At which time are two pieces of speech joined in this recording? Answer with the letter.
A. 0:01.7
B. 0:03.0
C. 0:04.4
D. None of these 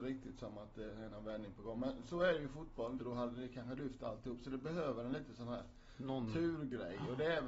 B